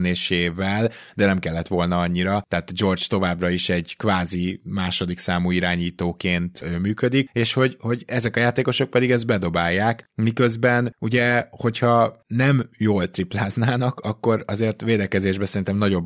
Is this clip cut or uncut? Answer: uncut